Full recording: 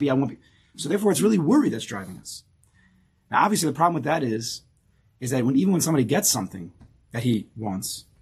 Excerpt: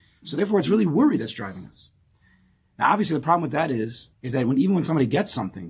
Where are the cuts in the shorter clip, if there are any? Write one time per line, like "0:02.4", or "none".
0:04.1